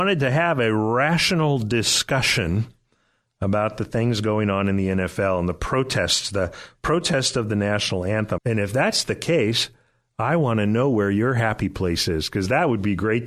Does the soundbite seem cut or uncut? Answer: cut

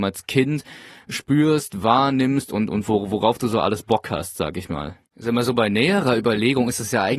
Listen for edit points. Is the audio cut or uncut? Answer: cut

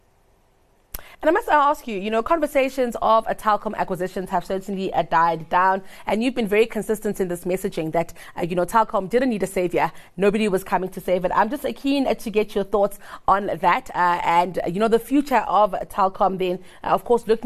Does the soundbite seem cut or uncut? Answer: uncut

